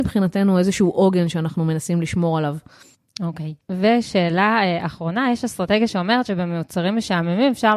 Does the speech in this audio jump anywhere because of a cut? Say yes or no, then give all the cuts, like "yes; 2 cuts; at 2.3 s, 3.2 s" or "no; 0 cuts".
no; 0 cuts